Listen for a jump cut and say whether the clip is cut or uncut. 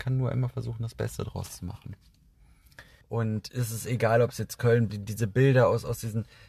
cut